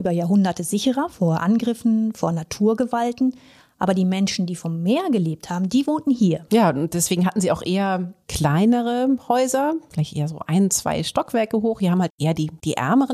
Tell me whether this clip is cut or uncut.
cut